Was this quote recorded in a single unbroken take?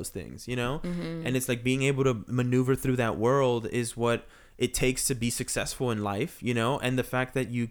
yes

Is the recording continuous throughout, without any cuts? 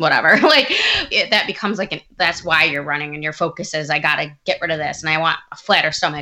no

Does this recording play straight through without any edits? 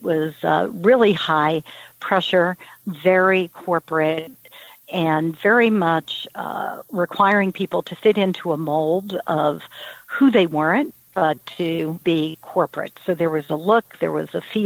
no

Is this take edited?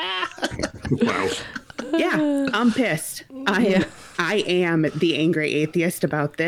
no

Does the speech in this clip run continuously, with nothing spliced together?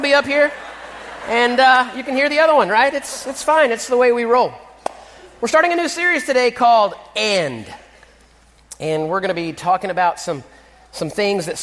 yes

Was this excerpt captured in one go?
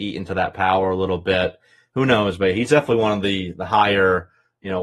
yes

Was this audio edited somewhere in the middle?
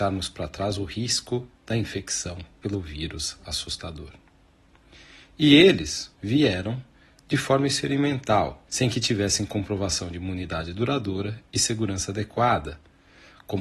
yes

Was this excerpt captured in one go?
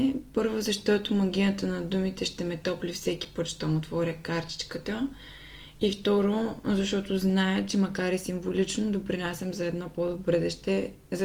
yes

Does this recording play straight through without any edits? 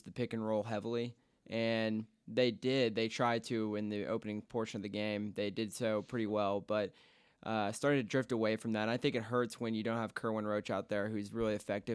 yes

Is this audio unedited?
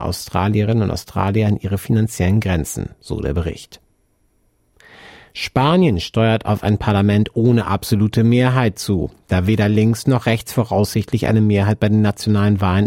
yes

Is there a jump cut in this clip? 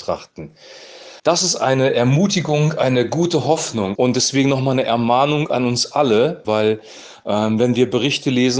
yes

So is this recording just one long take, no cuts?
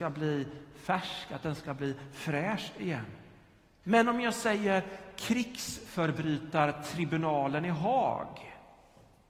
no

